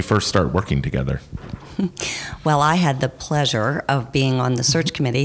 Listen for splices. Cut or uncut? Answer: uncut